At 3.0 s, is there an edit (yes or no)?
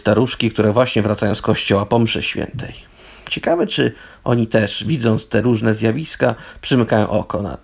no